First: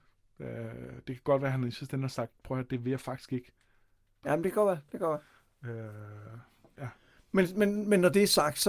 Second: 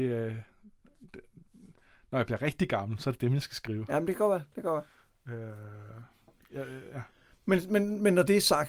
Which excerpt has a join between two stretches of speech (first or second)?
first